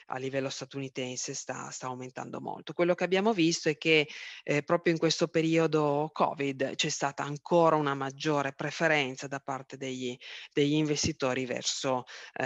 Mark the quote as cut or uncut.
uncut